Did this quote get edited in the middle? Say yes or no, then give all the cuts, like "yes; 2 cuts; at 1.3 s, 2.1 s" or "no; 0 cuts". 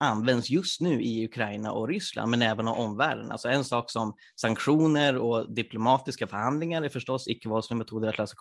no; 0 cuts